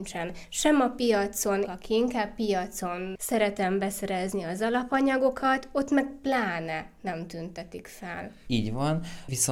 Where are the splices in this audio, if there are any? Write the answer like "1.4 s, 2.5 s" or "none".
1.6 s, 8.5 s